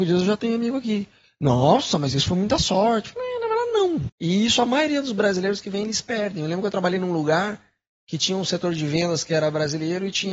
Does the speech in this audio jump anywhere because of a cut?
yes; 1 cut; at 4.1 s

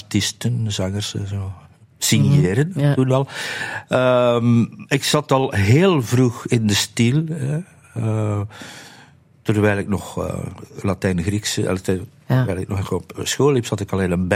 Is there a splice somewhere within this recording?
no; 0 cuts

